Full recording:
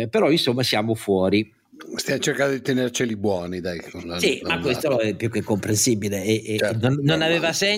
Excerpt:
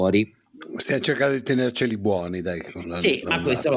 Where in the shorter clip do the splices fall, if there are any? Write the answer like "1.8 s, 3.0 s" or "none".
none